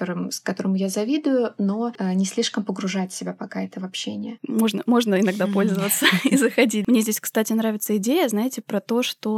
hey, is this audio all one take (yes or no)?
no